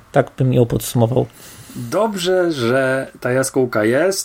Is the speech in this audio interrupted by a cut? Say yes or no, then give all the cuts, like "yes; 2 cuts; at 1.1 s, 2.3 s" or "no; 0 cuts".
no; 0 cuts